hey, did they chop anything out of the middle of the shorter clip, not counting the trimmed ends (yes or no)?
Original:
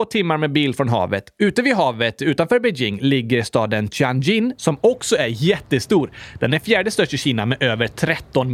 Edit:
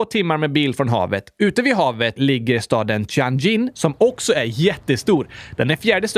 yes